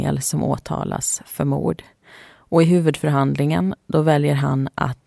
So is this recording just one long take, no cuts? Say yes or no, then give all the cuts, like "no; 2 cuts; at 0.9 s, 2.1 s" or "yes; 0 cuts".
yes; 0 cuts